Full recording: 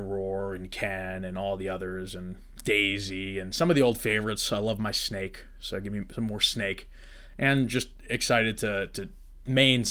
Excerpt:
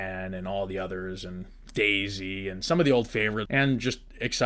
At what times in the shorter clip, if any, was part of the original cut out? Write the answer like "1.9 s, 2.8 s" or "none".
3.5 s